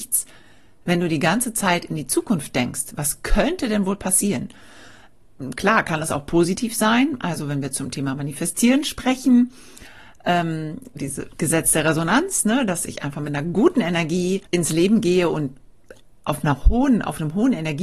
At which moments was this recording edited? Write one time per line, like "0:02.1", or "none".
0:11.0
0:14.5